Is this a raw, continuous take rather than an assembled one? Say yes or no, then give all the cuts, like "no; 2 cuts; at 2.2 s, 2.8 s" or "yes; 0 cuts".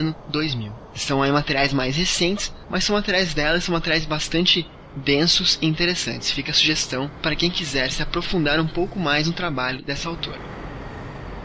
yes; 0 cuts